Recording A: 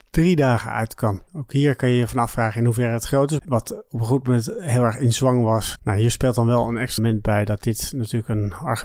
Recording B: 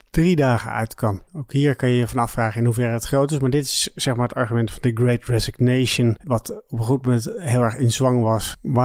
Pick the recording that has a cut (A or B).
A